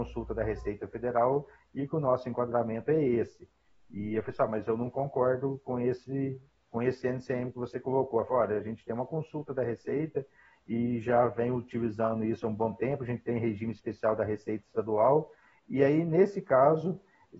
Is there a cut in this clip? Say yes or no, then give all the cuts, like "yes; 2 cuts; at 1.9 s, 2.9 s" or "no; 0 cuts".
no; 0 cuts